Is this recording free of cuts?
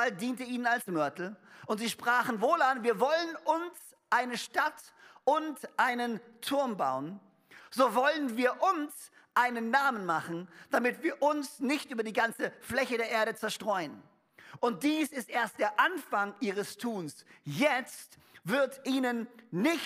no; 2 cuts; at 7.6 s, 14.6 s

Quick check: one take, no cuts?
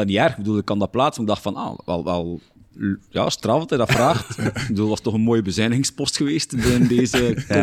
yes; 0 cuts

